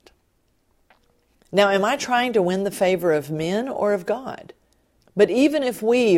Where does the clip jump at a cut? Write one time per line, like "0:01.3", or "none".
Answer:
0:01.3
0:05.0